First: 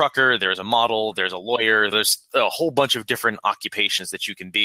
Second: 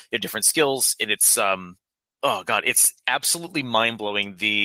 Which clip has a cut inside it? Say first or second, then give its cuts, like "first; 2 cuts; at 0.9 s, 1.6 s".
first; 1 cut; at 1.9 s